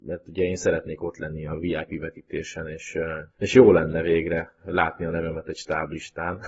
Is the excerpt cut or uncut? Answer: cut